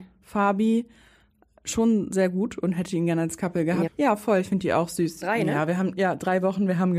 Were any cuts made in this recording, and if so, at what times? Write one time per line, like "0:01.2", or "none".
0:03.9
0:05.2